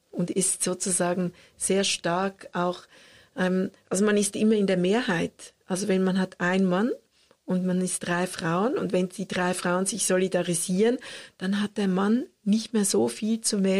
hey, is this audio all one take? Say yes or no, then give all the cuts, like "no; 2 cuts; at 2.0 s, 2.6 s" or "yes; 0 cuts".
yes; 0 cuts